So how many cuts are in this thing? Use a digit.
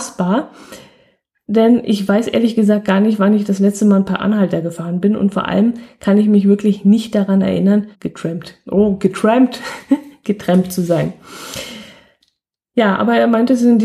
1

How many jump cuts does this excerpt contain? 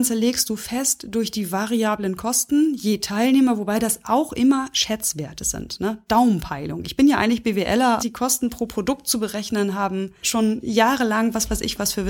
2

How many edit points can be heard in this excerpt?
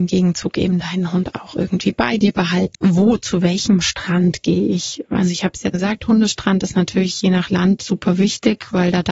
2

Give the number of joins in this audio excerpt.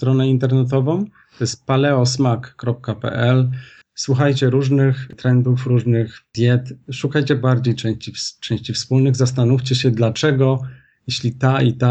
1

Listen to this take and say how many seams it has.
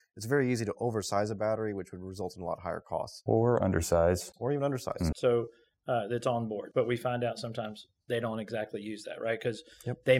2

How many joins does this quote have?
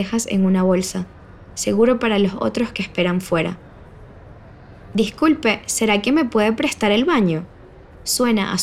0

